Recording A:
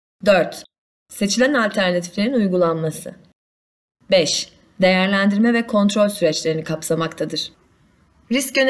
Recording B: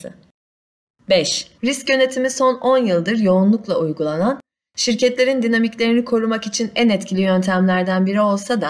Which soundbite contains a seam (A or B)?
B